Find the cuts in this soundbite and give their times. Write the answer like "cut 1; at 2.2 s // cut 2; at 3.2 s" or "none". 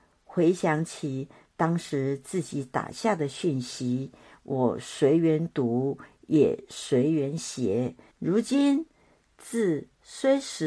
cut 1; at 8.1 s